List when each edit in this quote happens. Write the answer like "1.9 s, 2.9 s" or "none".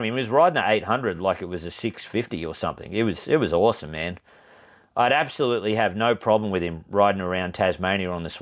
none